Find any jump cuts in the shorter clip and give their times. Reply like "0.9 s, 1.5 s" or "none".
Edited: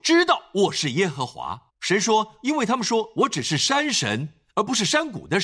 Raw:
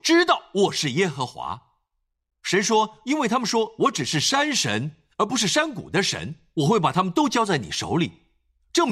1.7 s